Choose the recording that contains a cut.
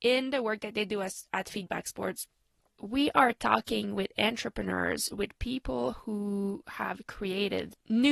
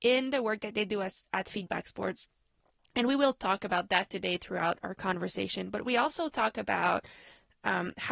first; 1 cut; at 2.7 s

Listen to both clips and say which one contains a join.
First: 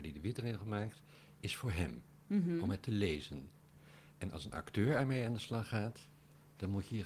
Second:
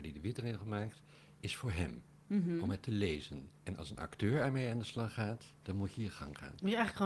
second; 2 cuts; at 3.6 s, 5.5 s

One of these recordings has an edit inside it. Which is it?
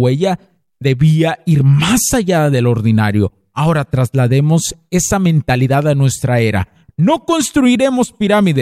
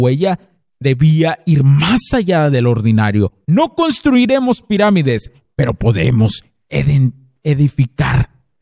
second; 1 cut; at 3.4 s

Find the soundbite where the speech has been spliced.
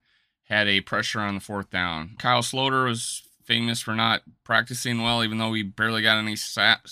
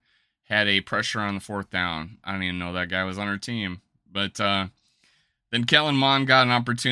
first; 1 cut; at 2.2 s

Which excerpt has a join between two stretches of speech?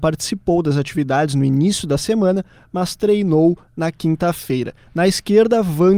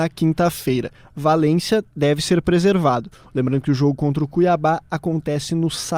first; 1 cut; at 4.9 s

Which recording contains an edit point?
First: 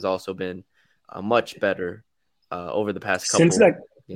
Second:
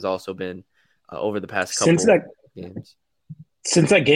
second; 1 cut; at 1.1 s

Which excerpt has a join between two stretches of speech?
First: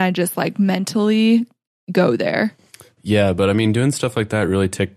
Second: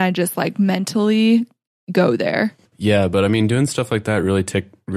second; 1 cut; at 2.6 s

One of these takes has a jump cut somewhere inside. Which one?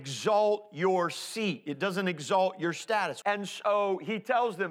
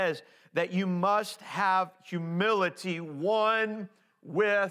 first; 1 cut; at 3.2 s

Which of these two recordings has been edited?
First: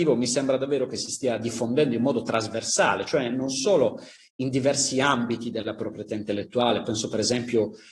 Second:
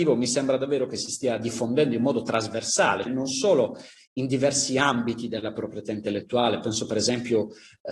second; 1 cut; at 3.1 s

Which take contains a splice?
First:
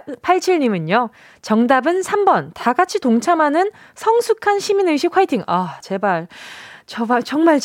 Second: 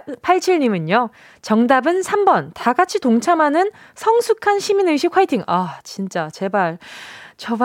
first; 1 cut; at 5.8 s

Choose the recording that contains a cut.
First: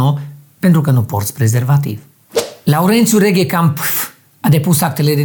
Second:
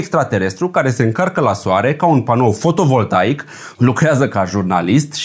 second; 1 cut; at 3.7 s

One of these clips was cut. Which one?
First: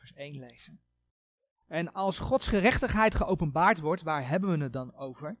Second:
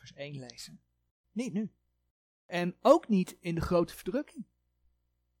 second; 1 cut; at 1.2 s

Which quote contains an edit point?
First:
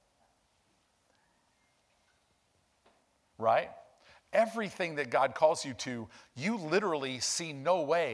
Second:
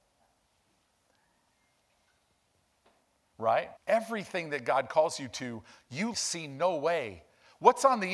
second; 2 cuts; at 3.8 s, 6.1 s

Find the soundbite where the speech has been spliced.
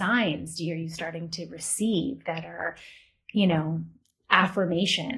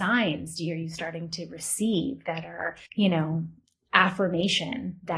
second; 1 cut; at 2.8 s

